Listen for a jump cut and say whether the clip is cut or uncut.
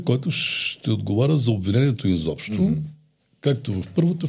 uncut